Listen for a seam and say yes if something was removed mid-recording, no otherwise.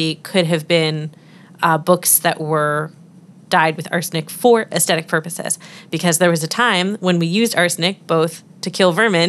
no